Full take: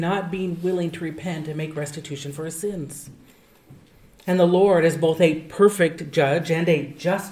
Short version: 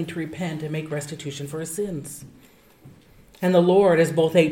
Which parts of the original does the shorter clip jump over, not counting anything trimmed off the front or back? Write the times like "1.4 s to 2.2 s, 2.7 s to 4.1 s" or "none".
none